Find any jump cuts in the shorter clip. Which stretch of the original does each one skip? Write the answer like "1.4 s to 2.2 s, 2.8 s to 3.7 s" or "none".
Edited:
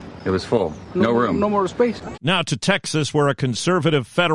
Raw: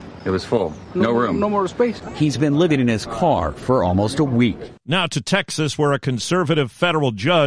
2.1 s to 4.8 s